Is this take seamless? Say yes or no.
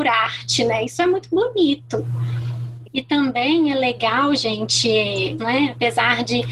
no